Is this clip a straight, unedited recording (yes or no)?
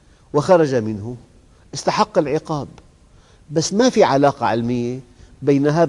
yes